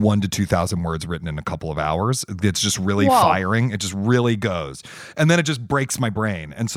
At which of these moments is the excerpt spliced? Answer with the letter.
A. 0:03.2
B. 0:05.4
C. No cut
C